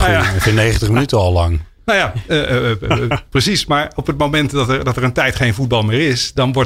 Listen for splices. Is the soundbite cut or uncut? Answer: uncut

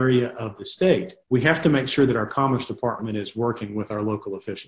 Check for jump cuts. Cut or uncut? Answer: cut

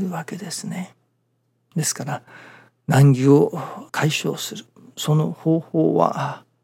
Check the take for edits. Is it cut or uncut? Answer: cut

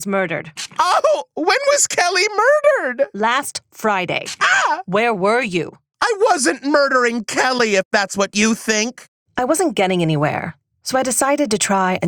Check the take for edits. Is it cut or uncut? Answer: uncut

